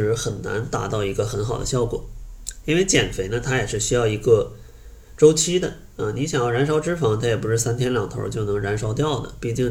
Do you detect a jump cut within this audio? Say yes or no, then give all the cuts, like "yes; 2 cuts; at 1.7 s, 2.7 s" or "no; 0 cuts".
no; 0 cuts